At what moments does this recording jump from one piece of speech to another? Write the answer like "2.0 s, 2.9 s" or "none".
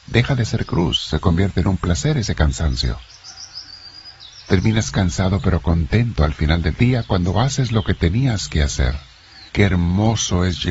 9.5 s